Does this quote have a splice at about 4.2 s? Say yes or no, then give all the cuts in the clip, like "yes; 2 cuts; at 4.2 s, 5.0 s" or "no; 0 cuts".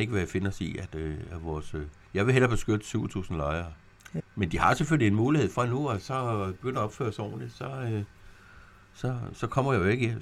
yes; 1 cut; at 4.2 s